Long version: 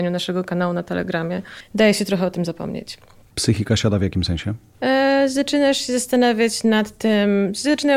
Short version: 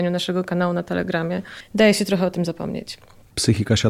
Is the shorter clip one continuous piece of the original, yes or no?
yes